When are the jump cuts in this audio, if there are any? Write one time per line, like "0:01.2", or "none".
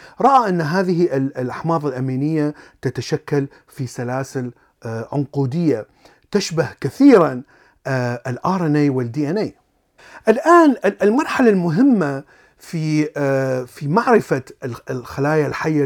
none